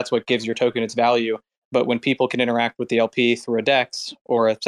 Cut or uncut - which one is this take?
uncut